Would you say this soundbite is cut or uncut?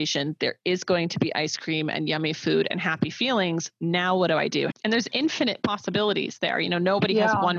cut